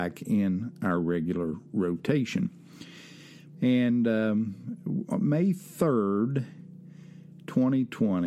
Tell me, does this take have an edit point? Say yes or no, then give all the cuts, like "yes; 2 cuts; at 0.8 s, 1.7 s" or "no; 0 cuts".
yes; 1 cut; at 3.5 s